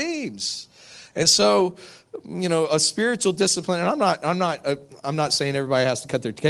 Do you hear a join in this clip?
no; 0 cuts

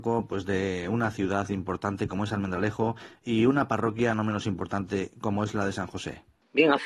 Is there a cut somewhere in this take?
no; 0 cuts

